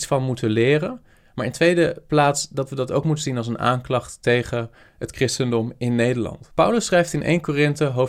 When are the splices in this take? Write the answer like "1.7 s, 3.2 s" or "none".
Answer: none